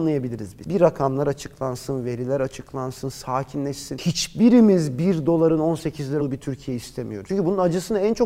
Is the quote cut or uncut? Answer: cut